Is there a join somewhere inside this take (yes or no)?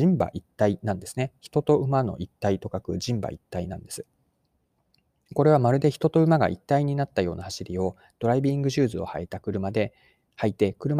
no